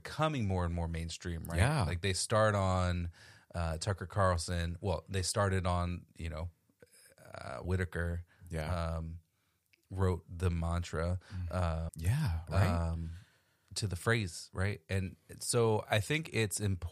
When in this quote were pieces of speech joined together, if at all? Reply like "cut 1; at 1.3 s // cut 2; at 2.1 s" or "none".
cut 1; at 7.6 s // cut 2; at 11.9 s // cut 3; at 15.9 s